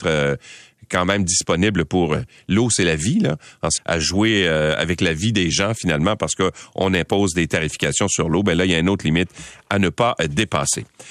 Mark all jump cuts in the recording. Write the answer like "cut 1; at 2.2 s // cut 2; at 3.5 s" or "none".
cut 1; at 3.8 s